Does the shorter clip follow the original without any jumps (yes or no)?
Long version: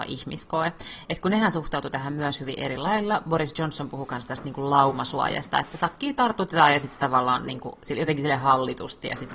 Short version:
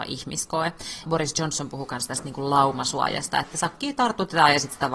no